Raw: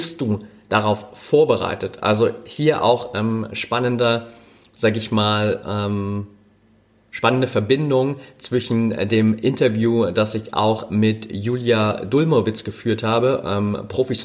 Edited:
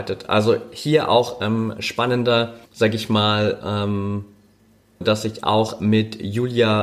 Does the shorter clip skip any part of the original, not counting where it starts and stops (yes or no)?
yes